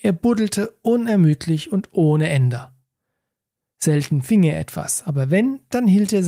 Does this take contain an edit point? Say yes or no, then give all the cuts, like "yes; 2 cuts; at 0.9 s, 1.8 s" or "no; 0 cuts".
no; 0 cuts